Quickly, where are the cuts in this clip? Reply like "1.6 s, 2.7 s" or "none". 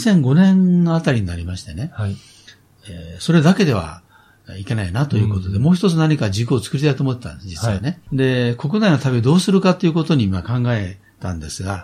8.1 s